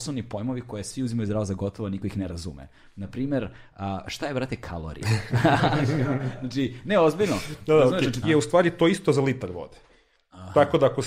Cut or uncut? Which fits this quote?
cut